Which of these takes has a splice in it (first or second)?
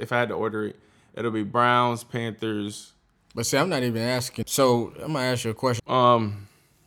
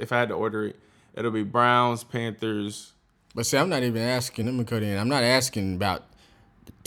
first